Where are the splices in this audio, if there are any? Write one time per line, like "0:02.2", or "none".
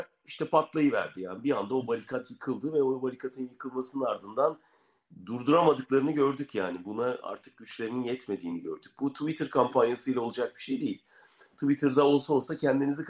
none